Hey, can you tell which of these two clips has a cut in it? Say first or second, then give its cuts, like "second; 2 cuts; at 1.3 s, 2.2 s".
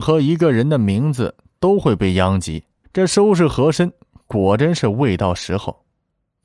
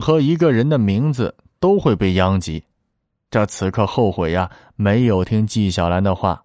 first; 1 cut; at 2.8 s